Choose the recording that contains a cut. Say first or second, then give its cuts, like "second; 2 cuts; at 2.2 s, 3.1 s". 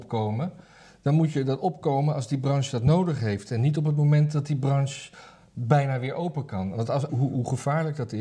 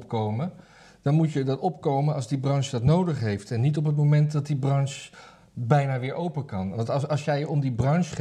first; 1 cut; at 7.1 s